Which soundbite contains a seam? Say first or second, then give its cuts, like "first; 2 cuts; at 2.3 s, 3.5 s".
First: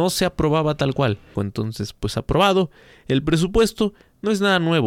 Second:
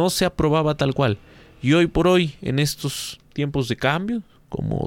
first; 1 cut; at 1.4 s